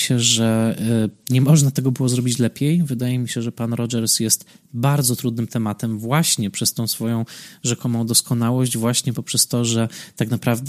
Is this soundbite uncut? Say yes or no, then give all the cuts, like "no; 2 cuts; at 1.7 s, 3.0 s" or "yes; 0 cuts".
yes; 0 cuts